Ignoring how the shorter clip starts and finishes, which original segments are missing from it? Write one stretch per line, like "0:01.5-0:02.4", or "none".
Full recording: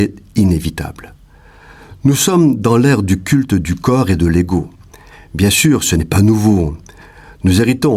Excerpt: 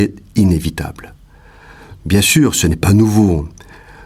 0:02.0-0:05.3